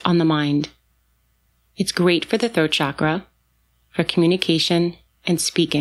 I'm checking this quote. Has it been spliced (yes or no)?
no